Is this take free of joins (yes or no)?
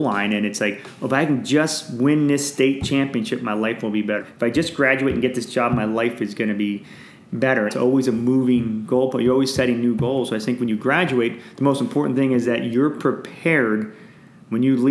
no